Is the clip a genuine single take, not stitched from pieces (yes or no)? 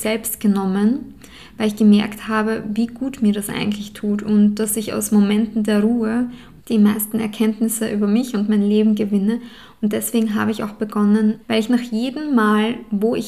no